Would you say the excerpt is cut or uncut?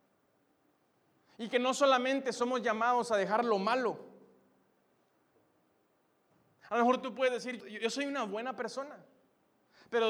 cut